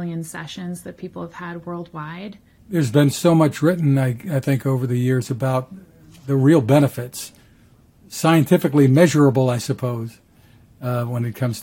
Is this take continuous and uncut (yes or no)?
no